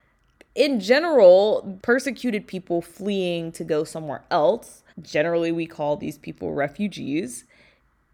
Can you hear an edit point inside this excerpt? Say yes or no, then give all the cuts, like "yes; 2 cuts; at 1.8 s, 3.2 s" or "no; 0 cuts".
yes; 2 cuts; at 1.8 s, 4.9 s